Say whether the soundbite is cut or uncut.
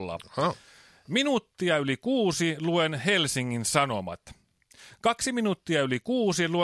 uncut